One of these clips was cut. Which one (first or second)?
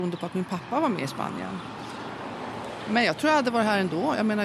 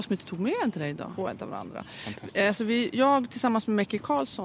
second